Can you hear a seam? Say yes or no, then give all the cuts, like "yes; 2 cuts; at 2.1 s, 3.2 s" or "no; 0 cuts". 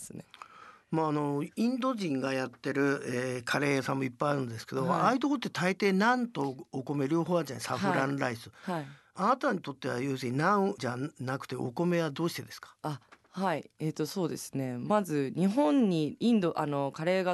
no; 0 cuts